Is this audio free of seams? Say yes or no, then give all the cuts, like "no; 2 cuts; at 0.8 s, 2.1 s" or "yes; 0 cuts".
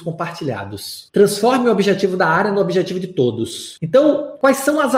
no; 1 cut; at 3.8 s